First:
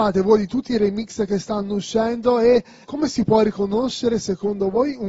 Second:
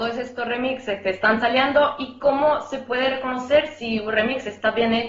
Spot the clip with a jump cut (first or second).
first